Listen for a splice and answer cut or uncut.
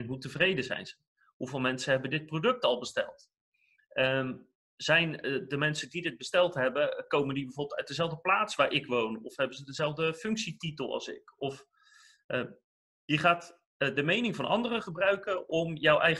uncut